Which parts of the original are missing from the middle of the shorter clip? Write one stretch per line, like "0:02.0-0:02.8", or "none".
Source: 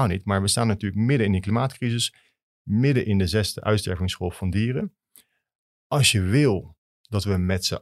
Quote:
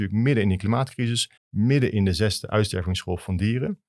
0:02.2-0:02.5